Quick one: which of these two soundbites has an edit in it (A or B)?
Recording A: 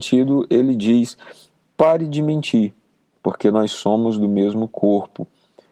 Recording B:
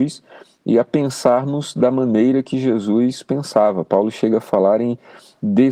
A